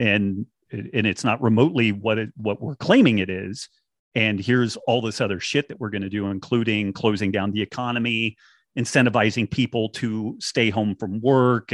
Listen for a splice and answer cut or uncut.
uncut